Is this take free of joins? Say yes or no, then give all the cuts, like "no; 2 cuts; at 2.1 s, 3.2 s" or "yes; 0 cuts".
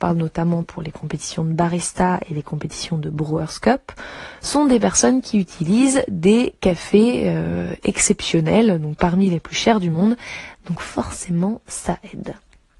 yes; 0 cuts